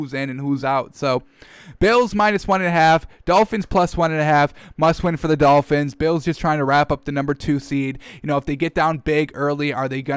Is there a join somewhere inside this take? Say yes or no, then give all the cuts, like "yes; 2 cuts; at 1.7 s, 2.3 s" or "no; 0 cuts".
no; 0 cuts